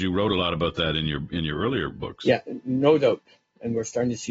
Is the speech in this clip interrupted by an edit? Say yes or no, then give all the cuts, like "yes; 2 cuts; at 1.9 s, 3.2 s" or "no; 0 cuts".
no; 0 cuts